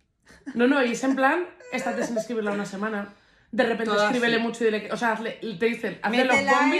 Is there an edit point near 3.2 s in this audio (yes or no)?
no